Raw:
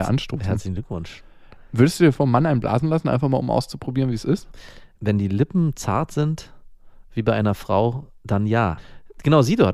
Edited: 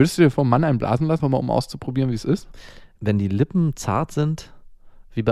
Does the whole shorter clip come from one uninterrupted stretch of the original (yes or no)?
no